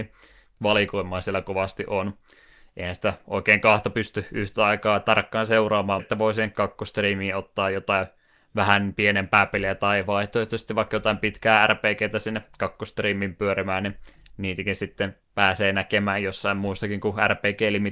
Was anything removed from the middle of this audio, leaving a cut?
yes; 2 cuts; at 6.0 s, 15.2 s

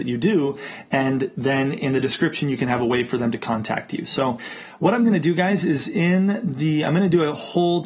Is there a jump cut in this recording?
no; 0 cuts

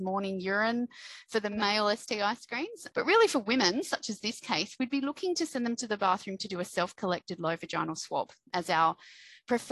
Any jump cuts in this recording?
yes; 1 cut; at 2.9 s

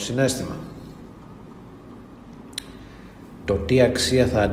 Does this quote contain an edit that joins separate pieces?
yes; 1 cut; at 3.4 s

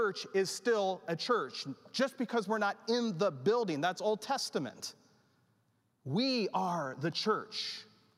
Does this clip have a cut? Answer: no; 0 cuts

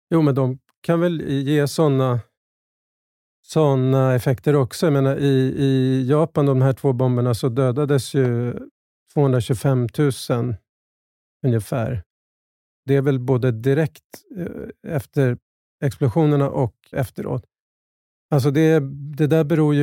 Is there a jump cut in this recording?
yes; 1 cut; at 16.9 s

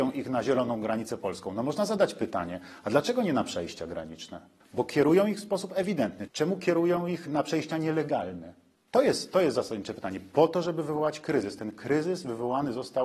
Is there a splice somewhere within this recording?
yes; 2 cuts; at 4.6 s, 6.3 s

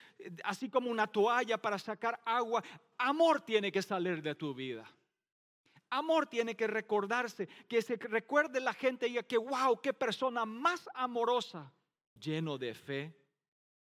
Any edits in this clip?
yes; 1 cut; at 12.2 s

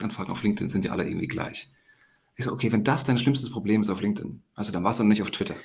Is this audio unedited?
yes; 0 cuts

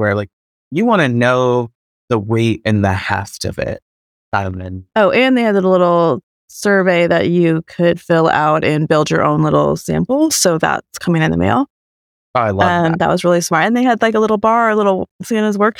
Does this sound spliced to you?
no; 0 cuts

